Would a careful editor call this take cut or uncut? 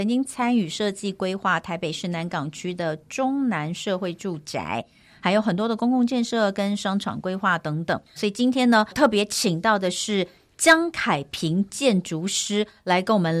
cut